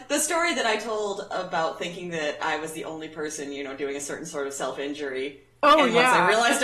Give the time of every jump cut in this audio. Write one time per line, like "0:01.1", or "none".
none